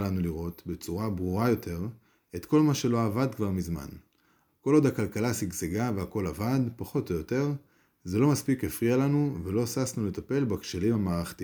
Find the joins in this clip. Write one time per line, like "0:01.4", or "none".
0:04.5